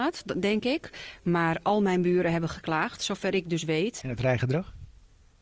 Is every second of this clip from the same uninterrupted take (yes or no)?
no